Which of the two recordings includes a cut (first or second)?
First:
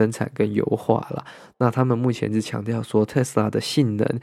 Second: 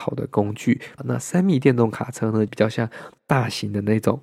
second